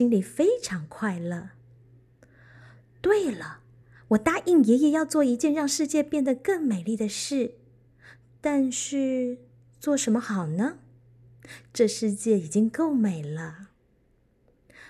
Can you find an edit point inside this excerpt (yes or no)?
no